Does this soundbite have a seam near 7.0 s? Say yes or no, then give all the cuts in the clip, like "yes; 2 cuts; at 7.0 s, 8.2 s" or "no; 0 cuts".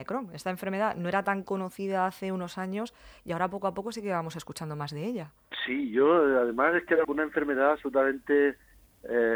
yes; 1 cut; at 7.0 s